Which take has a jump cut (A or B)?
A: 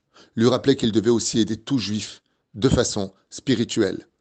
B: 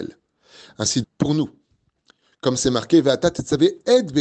B